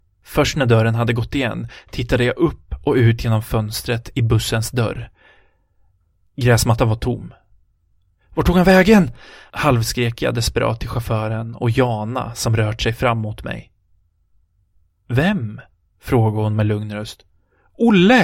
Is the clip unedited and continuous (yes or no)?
yes